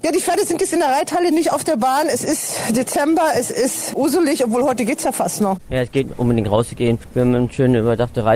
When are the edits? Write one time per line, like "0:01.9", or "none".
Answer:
0:06.1